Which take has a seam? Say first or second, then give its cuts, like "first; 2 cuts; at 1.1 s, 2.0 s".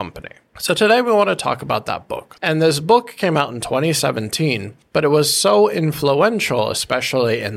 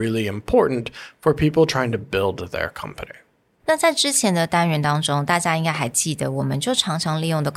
first; 1 cut; at 2.4 s